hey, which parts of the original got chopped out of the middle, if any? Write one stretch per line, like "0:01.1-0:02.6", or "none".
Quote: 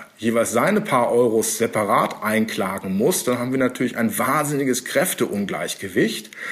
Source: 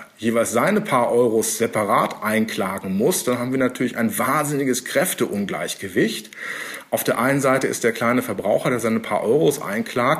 none